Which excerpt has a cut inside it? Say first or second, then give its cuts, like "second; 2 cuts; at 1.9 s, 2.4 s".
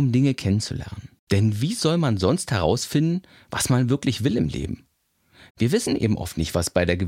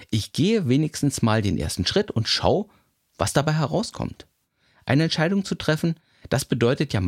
first; 2 cuts; at 1.2 s, 5.5 s